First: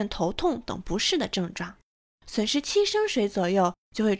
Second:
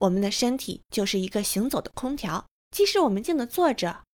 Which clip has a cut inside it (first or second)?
second